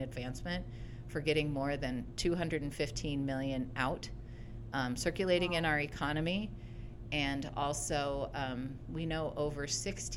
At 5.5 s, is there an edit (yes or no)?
no